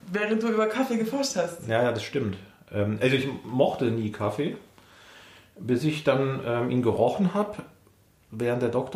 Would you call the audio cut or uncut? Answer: uncut